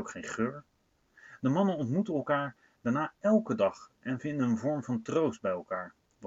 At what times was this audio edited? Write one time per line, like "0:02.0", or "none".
none